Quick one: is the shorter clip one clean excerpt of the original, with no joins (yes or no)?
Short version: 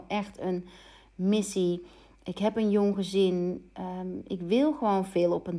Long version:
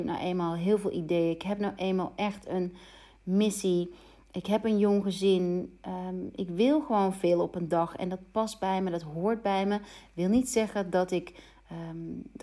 yes